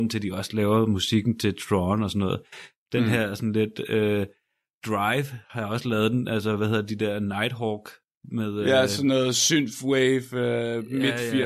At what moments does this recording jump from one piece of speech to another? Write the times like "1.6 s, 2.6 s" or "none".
none